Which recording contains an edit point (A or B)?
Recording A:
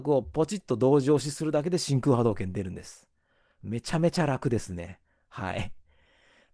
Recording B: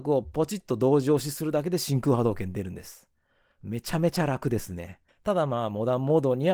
B